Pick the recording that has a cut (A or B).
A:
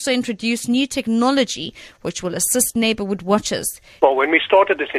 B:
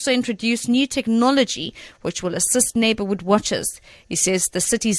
A